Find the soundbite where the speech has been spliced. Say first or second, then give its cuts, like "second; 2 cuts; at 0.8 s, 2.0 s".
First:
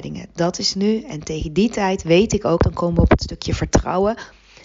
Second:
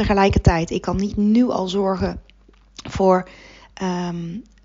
first; 1 cut; at 2.6 s